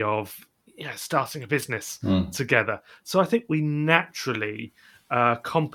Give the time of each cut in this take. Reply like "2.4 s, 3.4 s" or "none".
none